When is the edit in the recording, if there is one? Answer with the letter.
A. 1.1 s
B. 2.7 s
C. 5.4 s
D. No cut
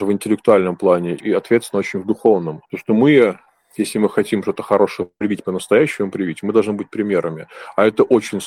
B